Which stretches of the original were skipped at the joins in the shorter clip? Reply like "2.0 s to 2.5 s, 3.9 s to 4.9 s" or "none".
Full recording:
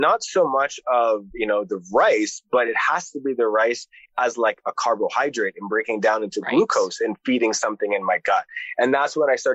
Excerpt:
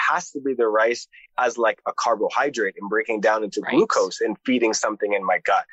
none